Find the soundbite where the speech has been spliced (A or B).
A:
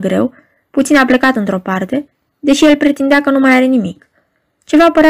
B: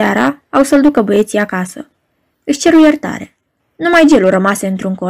B